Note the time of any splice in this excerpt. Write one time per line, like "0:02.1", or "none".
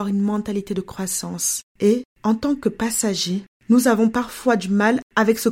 0:01.7